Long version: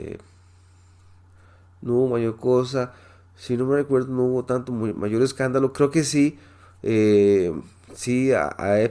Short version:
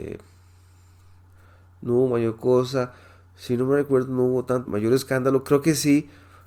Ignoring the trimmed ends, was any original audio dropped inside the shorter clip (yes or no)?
yes